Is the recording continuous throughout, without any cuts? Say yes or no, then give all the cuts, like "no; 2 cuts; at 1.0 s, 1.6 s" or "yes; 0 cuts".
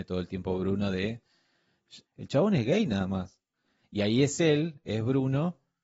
no; 1 cut; at 2.0 s